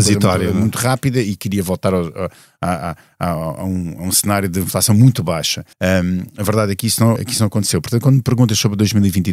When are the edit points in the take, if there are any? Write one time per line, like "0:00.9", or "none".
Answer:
0:05.7
0:07.2